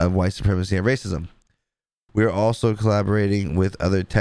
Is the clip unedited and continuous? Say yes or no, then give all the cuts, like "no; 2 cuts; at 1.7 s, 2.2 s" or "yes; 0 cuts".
no; 1 cut; at 2.1 s